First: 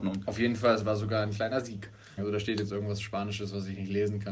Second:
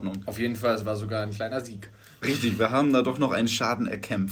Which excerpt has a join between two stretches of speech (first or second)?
first